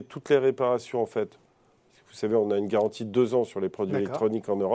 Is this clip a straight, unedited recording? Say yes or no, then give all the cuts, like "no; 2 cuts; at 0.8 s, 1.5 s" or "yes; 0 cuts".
yes; 0 cuts